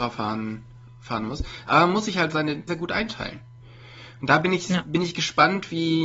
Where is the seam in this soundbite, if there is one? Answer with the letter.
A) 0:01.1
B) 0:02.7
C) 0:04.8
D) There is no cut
B